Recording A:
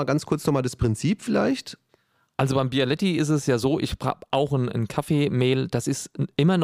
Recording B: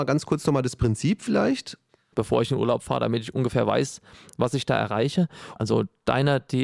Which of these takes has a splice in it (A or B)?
B